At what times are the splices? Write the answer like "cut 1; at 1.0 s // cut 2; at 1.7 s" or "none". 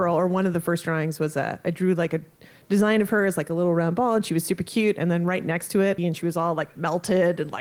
cut 1; at 6.0 s